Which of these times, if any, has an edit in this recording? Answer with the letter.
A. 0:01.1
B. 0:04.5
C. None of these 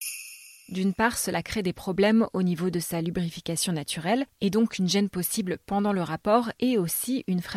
C